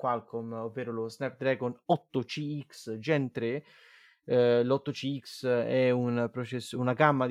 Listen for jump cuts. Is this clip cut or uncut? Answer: uncut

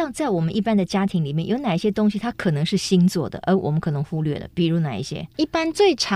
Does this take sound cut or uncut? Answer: uncut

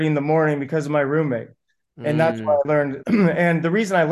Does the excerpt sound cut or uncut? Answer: cut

